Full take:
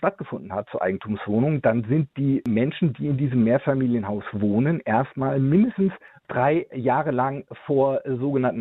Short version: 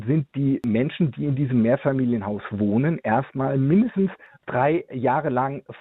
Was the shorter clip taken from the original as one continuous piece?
yes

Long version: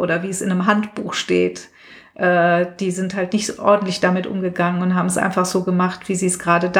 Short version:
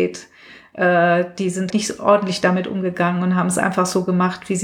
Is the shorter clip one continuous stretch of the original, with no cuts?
no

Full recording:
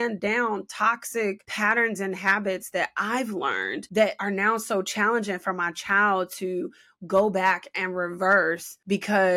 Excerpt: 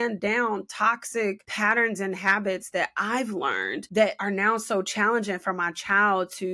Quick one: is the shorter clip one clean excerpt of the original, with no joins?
yes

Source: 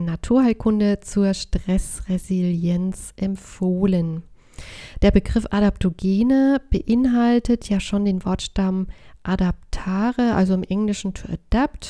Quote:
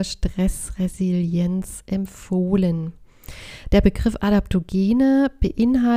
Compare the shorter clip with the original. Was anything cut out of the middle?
no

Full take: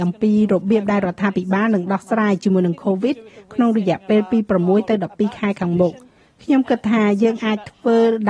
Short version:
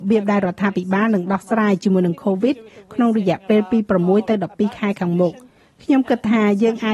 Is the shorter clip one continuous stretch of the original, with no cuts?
yes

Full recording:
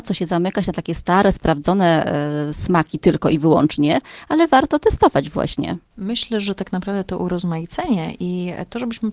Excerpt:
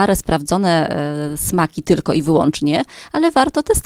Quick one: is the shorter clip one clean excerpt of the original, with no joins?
yes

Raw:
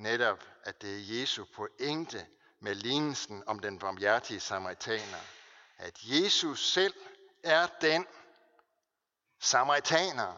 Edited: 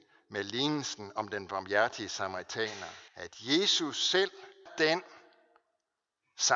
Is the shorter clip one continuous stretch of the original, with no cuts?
no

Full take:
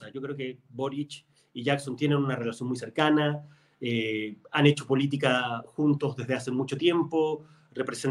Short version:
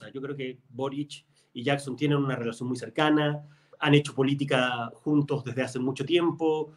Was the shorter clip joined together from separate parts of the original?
yes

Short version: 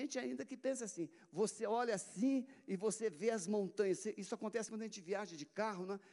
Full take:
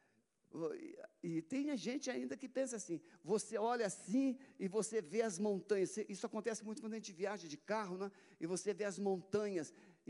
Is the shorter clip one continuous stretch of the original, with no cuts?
no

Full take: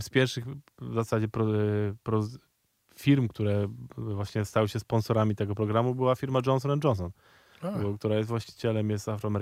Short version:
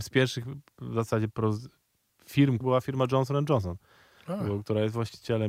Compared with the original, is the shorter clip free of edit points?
no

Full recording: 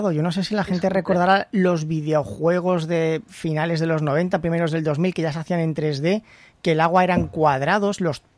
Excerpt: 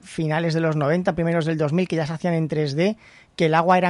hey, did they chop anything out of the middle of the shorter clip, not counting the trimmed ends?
no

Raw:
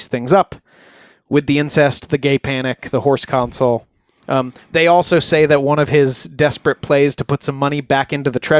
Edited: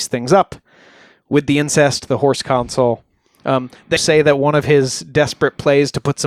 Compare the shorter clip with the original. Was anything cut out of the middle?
yes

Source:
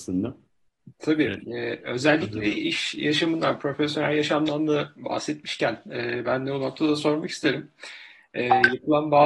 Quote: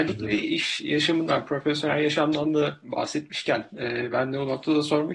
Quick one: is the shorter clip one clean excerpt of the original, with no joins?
yes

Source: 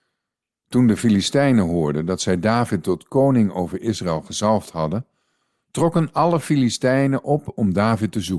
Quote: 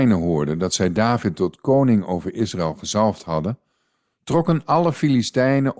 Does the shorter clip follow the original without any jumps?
yes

